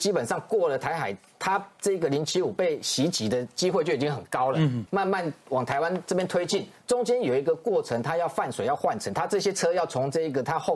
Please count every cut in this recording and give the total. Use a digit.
2